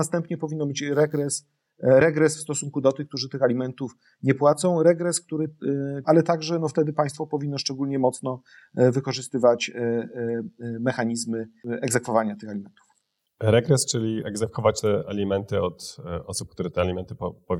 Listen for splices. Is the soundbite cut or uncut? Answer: cut